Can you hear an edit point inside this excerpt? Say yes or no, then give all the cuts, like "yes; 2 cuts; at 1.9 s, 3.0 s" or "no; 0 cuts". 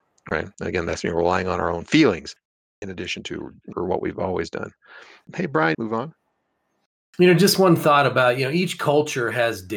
yes; 2 cuts; at 3.7 s, 5.7 s